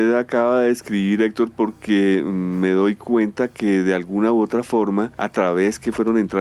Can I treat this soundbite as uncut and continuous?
yes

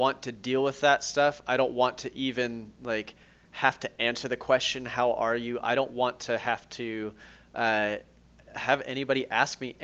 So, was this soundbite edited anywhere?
no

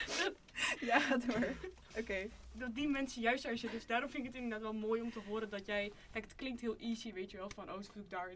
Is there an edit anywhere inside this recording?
no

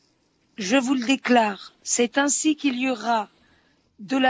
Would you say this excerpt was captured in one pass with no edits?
yes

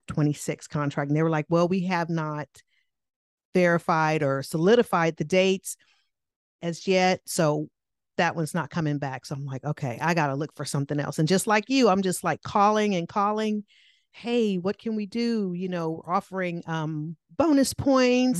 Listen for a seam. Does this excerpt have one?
yes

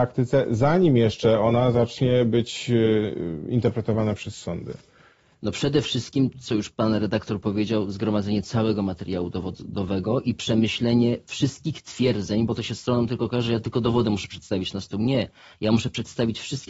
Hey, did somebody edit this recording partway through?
yes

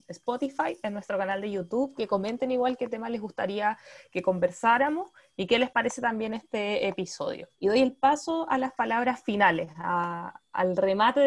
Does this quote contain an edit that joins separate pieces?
yes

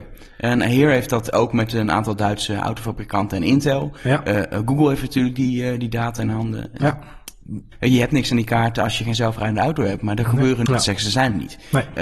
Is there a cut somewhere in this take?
yes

